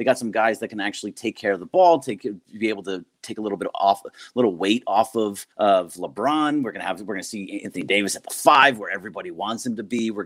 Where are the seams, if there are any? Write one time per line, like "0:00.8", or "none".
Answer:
0:05.5